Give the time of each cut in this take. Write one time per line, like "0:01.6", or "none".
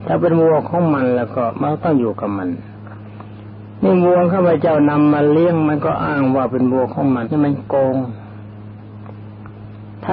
0:07.3